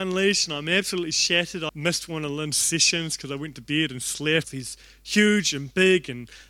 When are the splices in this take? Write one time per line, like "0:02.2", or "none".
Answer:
0:01.7
0:04.4